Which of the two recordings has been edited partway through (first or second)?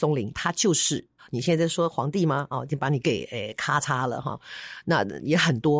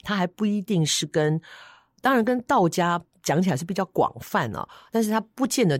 first